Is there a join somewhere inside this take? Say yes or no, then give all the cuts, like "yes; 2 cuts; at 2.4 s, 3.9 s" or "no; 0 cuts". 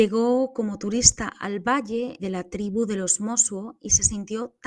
yes; 1 cut; at 2.2 s